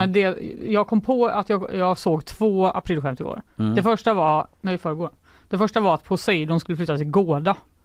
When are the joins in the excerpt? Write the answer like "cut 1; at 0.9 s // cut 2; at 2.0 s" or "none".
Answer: none